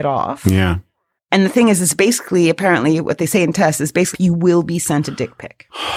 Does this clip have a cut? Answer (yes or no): yes